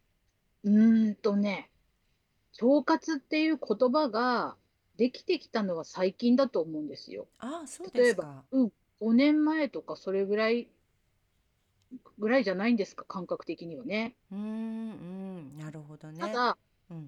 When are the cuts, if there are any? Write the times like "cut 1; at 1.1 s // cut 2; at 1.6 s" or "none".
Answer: cut 1; at 8.5 s